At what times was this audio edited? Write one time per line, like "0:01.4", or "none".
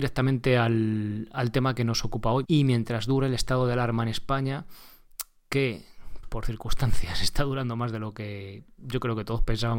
0:02.4
0:06.2